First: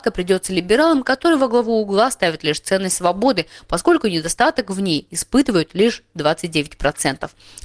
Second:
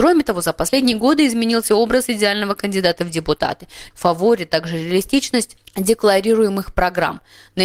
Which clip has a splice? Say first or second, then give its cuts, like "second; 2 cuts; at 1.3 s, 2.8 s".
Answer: second; 1 cut; at 3.9 s